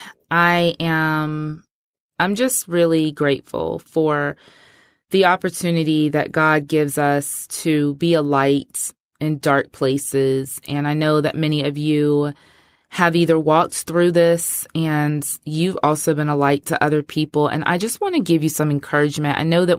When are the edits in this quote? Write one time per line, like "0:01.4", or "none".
none